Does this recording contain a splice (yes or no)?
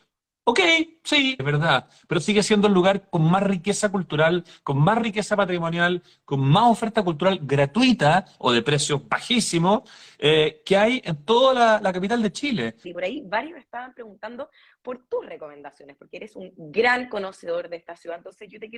yes